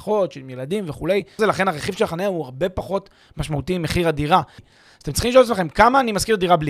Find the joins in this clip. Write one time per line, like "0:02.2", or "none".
0:01.4
0:04.6